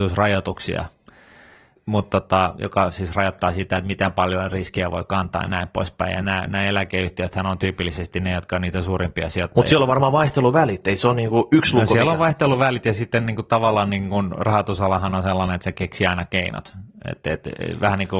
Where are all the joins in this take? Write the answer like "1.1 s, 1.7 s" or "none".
none